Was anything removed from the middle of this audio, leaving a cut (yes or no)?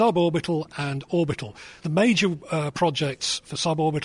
yes